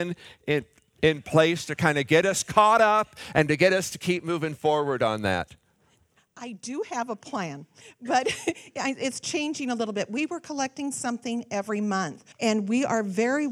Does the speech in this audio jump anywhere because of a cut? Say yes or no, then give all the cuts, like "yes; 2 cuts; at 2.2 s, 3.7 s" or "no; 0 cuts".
yes; 1 cut; at 12.3 s